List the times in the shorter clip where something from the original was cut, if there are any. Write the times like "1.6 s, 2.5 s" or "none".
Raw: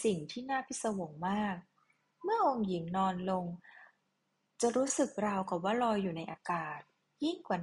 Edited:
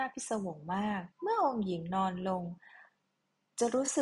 1.1 s